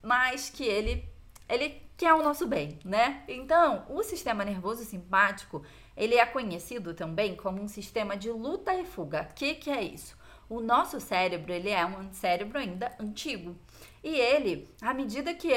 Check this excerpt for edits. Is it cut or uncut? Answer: uncut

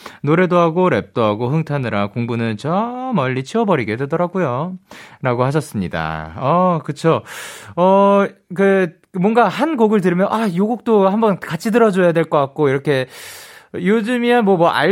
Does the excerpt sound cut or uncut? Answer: uncut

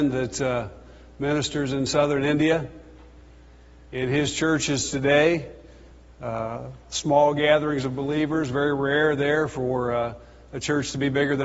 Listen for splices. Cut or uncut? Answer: uncut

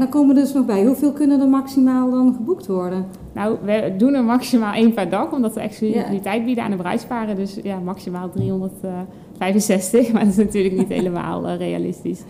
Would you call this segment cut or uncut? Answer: uncut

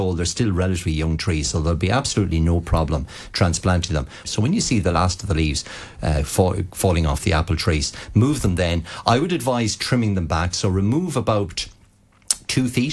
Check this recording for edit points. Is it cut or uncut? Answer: cut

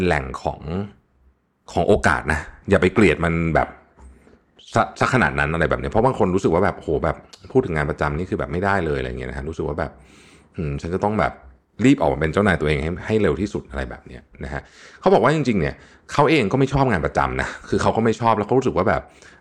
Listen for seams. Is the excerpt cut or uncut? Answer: uncut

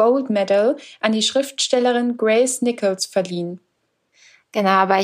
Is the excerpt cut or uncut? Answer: uncut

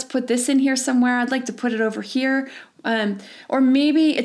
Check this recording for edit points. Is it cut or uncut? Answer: uncut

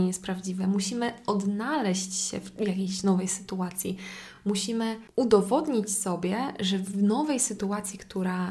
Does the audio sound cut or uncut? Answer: uncut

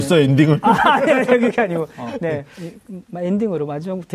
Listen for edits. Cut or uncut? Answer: uncut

